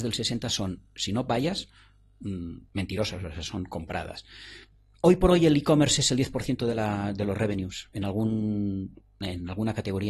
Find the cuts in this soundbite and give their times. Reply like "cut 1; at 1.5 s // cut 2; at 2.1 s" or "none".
cut 1; at 2.7 s // cut 2; at 4.9 s